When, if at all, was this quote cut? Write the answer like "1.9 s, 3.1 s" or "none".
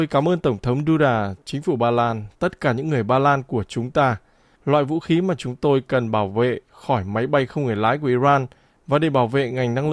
4.6 s